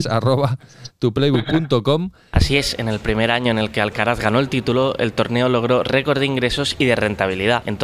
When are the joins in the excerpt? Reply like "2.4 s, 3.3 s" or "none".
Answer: 2.3 s